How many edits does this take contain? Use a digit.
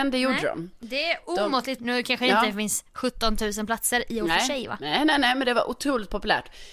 1